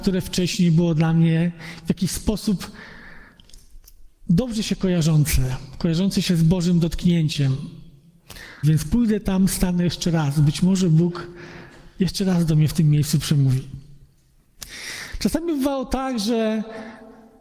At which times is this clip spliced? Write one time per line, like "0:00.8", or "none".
0:08.6